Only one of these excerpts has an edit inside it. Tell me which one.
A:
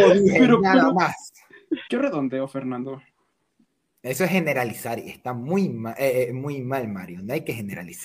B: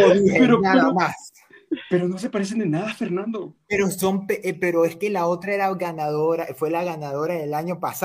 A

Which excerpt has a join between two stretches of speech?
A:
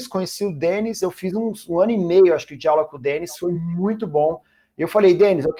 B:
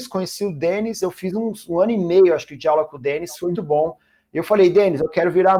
B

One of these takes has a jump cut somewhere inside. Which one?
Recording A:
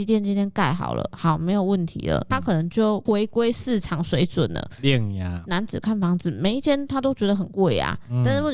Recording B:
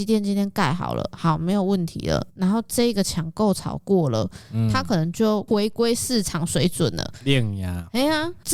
A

